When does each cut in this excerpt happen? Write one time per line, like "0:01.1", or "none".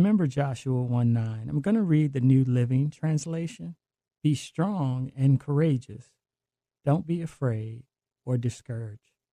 0:04.1